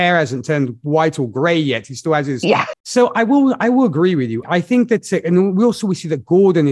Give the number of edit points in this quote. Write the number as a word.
two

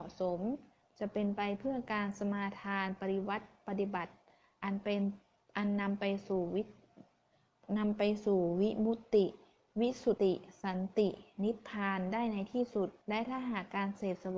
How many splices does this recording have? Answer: two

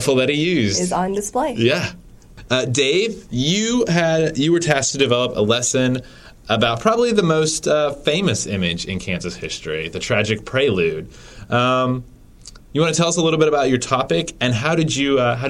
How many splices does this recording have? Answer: zero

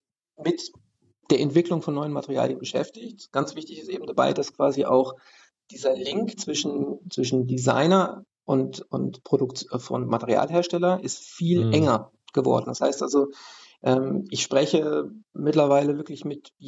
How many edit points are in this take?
one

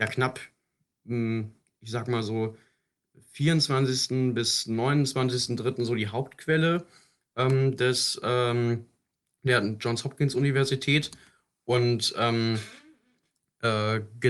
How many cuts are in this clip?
zero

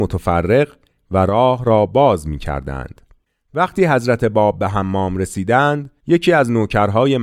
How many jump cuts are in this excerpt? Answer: one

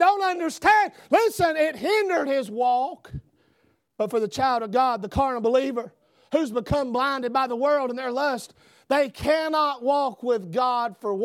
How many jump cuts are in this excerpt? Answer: zero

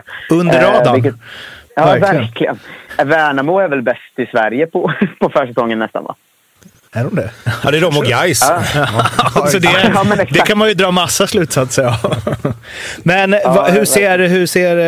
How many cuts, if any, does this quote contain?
one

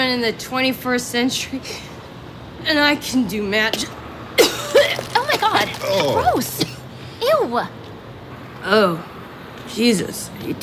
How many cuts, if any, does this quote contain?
zero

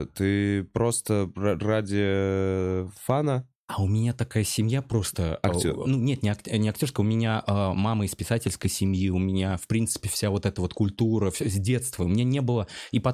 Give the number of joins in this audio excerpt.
one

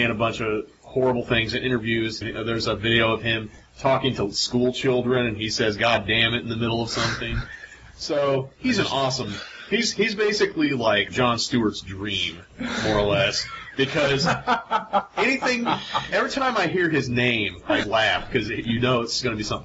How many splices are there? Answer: three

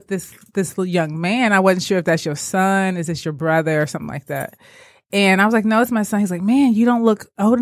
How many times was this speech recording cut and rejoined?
zero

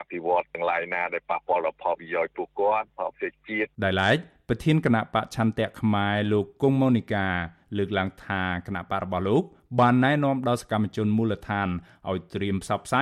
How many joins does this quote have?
one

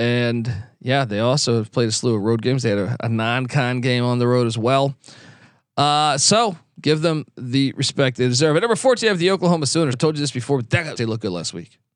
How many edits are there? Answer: two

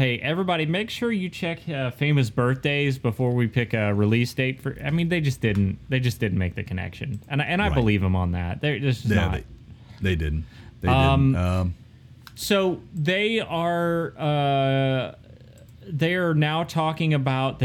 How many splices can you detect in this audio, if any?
zero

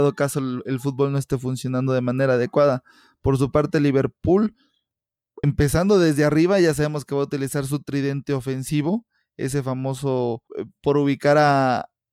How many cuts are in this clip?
two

